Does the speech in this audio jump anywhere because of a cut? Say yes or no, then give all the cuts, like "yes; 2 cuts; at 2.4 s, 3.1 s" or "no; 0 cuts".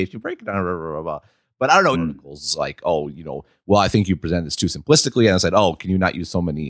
yes; 1 cut; at 1.9 s